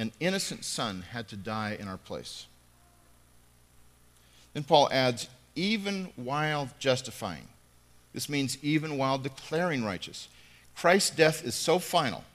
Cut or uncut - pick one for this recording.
uncut